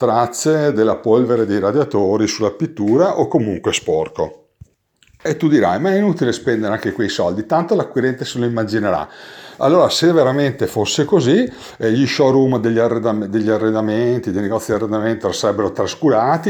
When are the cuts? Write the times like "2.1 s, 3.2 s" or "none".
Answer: none

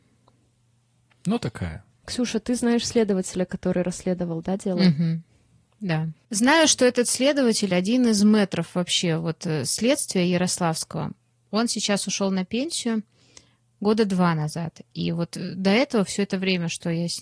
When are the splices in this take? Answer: none

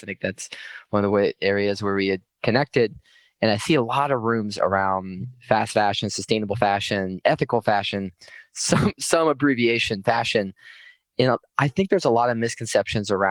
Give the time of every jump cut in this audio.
7.2 s

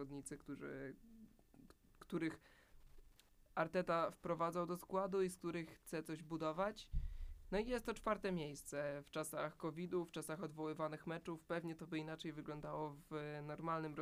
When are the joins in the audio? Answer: none

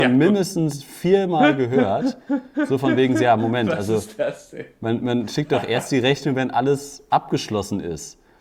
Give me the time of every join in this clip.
none

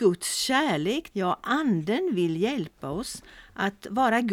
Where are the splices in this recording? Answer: 1.1 s

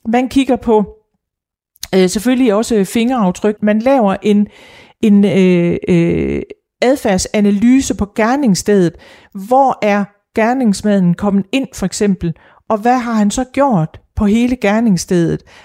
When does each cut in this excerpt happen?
3.6 s

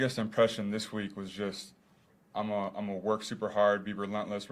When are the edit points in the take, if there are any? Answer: none

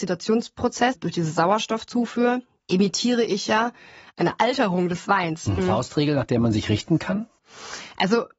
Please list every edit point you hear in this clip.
0.9 s, 5.6 s

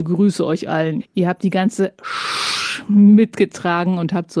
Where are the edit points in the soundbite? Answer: 1.0 s

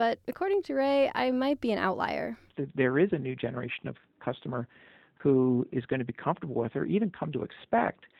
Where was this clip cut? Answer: none

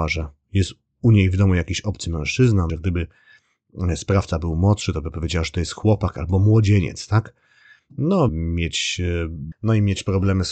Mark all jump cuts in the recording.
2.7 s, 8.3 s, 9.5 s

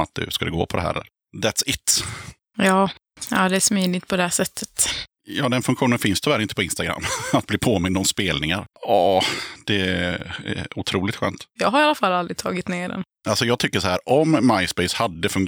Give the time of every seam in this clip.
8.7 s, 11.6 s

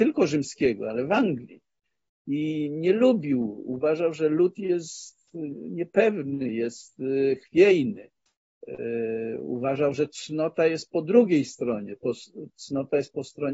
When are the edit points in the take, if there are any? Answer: 6.5 s

